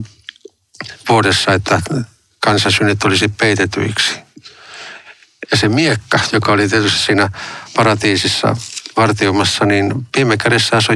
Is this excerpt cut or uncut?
cut